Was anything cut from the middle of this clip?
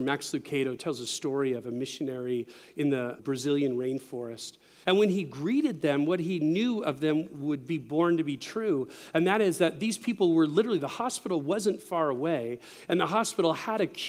yes; 2 cuts; at 3.2 s, 4.8 s

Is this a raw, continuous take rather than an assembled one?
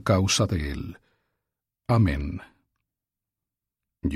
no; 1 cut; at 1.7 s

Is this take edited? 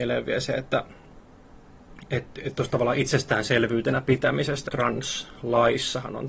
yes; 1 cut; at 4.7 s

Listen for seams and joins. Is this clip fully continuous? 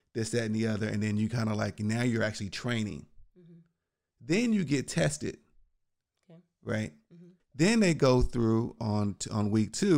no; 2 cuts; at 7.4 s, 8.8 s

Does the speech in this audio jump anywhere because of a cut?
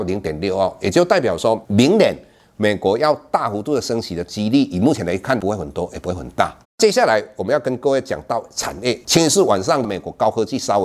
yes; 1 cut; at 6.6 s

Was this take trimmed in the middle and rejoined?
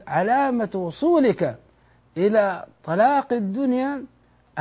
no; 0 cuts

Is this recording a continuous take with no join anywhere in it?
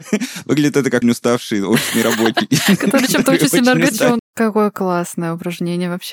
no; 2 cuts; at 1.0 s, 4.2 s

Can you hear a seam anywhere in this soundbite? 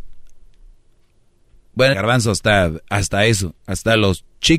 yes; 1 cut; at 1.9 s

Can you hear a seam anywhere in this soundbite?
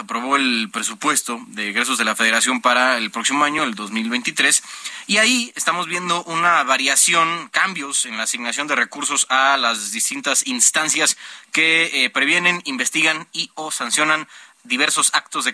no; 0 cuts

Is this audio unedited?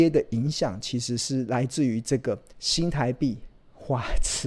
no; 1 cut; at 2.5 s

